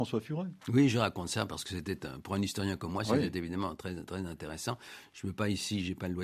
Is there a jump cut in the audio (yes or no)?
no